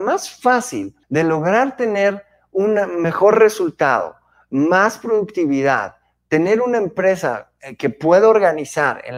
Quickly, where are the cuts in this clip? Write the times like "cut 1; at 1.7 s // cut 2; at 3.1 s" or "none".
cut 1; at 1.0 s